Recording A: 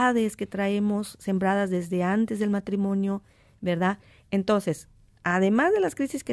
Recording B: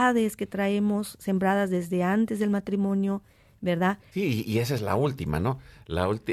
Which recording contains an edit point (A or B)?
B